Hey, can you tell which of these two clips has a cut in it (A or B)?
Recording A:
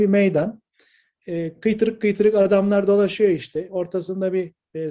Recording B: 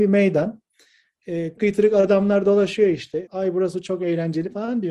B